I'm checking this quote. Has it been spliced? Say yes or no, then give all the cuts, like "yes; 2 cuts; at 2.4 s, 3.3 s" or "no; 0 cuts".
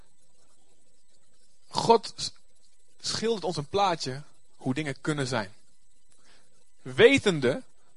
no; 0 cuts